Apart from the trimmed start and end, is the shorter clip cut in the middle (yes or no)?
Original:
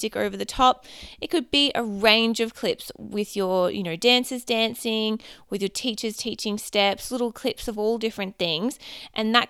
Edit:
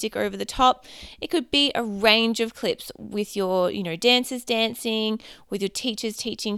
no